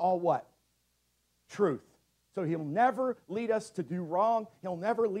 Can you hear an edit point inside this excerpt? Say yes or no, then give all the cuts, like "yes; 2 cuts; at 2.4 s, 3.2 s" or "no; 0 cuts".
no; 0 cuts